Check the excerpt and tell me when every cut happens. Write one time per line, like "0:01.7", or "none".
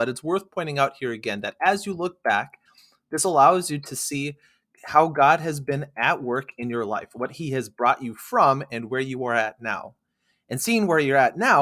none

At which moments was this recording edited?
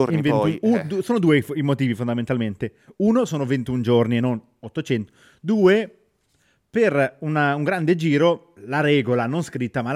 none

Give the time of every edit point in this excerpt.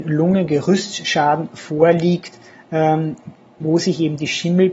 0:03.6

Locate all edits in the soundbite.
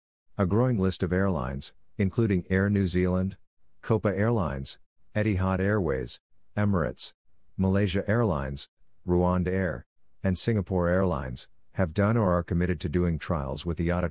0:07.5

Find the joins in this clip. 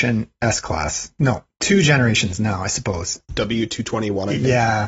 none

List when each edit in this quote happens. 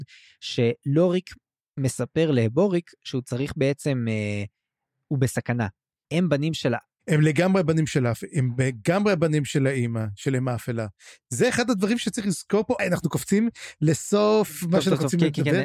0:06.0
0:12.8

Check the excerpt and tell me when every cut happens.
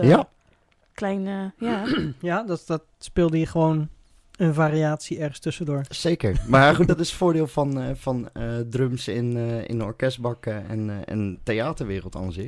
none

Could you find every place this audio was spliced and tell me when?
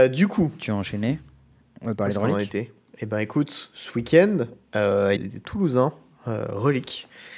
0:02.9
0:05.2

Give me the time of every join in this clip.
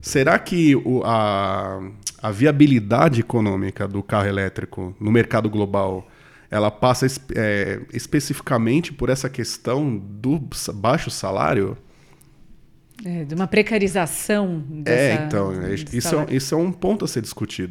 none

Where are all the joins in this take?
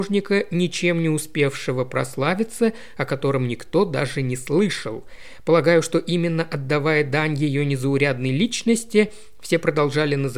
none

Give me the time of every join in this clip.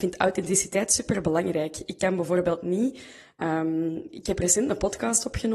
none

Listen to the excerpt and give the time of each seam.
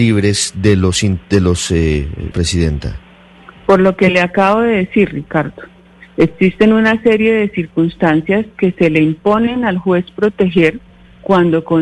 0:02.3

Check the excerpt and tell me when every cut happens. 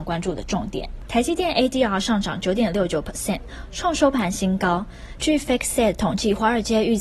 0:01.1
0:05.2

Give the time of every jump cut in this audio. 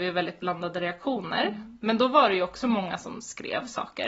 none

